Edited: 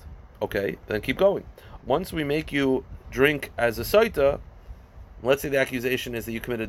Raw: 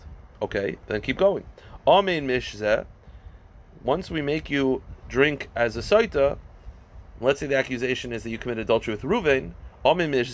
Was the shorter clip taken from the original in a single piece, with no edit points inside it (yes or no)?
no